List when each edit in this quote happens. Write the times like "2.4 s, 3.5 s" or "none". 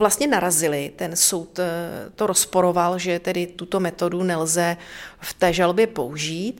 none